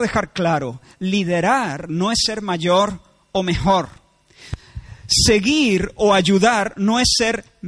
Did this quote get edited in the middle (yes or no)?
no